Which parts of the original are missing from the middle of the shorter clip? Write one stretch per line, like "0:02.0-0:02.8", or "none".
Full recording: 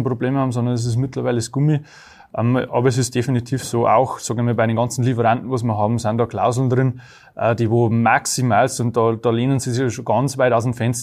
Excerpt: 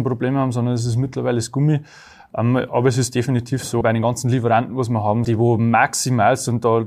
0:03.8-0:04.5
0:06.0-0:07.6